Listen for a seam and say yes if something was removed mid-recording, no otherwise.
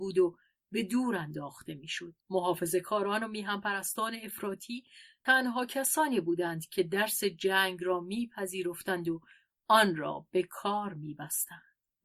yes